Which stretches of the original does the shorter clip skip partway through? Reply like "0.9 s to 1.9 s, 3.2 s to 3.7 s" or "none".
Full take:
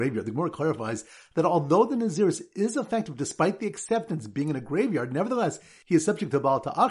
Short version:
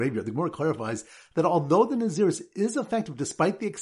none